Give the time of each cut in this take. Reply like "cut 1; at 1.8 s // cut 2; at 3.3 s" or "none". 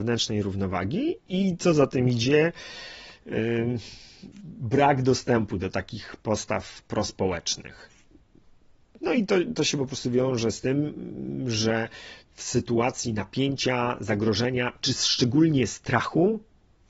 none